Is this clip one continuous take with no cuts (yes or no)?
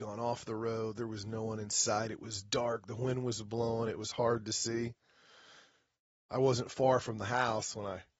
yes